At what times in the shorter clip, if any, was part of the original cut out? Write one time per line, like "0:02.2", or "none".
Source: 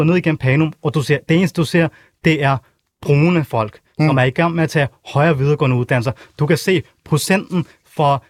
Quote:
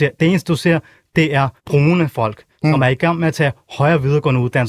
0:01.6